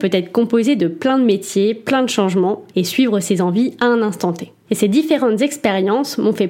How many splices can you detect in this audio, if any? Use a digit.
2